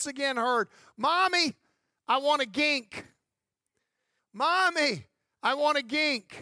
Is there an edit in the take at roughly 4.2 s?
yes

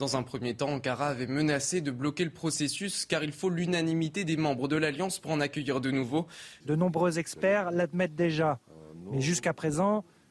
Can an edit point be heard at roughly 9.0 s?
no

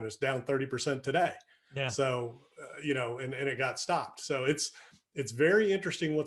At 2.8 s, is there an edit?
no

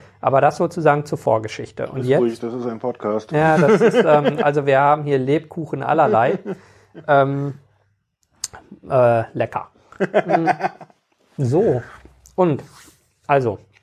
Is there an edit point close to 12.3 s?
no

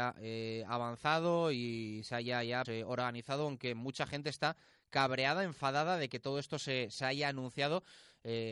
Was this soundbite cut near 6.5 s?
no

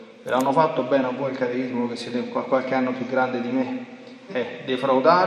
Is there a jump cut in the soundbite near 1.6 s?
no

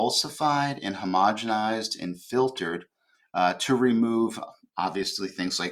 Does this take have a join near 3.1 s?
no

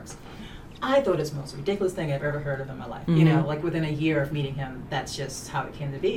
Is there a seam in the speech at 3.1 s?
yes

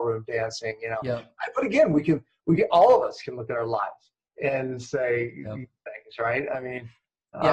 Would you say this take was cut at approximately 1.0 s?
no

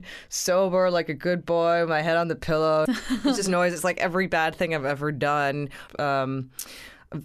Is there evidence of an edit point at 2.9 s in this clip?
yes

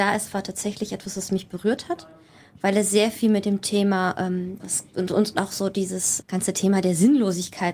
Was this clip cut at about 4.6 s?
yes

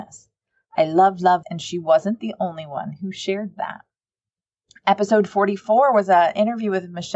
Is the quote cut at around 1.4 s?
yes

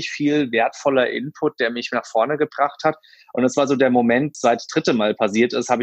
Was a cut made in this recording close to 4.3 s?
yes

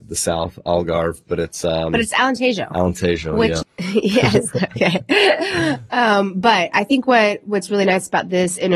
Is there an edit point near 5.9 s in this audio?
no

